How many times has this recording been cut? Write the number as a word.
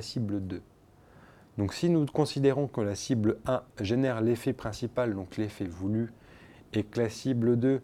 zero